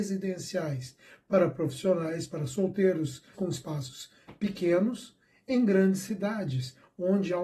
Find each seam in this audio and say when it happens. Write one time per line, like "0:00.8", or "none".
0:03.3